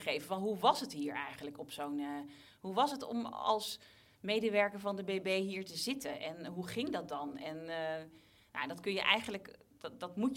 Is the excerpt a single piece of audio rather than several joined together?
yes; 0 cuts

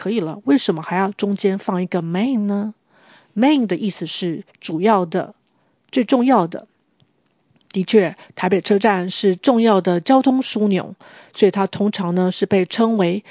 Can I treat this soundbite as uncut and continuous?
yes; 0 cuts

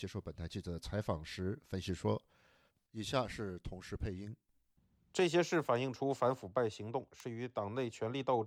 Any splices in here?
yes; 1 cut; at 2.8 s

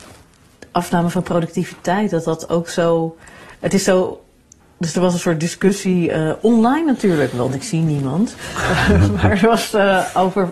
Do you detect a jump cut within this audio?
no; 0 cuts

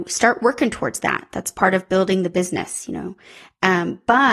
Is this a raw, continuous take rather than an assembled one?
yes; 0 cuts

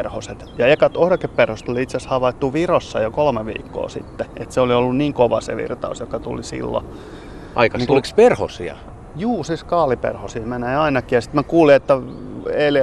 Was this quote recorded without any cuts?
no; 1 cut; at 7.9 s

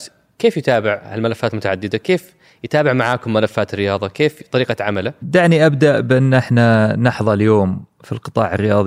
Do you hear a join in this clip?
yes; 1 cut; at 5.2 s

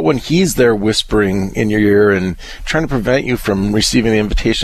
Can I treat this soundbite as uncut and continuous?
yes; 0 cuts

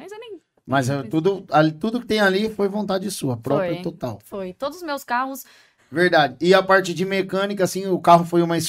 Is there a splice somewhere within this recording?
yes; 1 cut; at 5.8 s

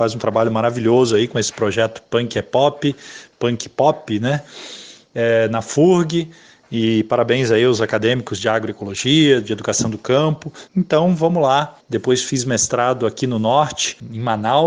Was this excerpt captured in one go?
no; 2 cuts; at 10.7 s, 11.8 s

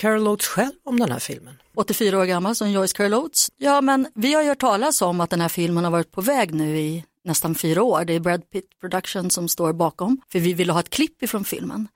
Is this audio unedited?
no; 3 cuts; at 1.7 s, 3.5 s, 10.2 s

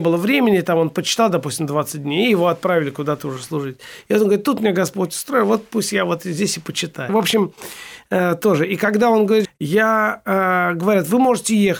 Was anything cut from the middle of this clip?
yes; 2 cuts; at 7.1 s, 9.4 s

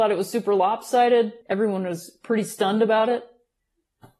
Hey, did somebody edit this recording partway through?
yes; 1 cut; at 1.4 s

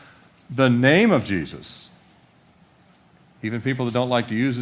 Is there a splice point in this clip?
no; 0 cuts

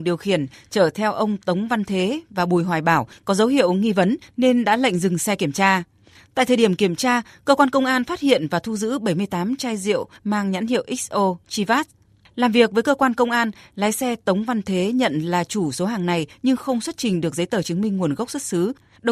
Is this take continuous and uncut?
yes; 0 cuts

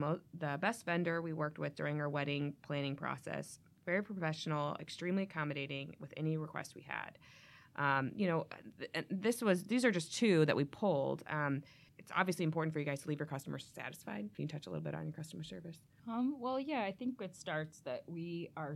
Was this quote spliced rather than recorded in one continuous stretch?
no; 0 cuts

